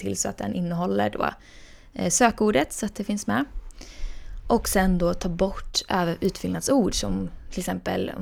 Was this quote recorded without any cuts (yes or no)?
yes